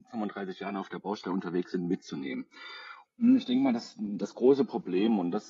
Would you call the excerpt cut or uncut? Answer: cut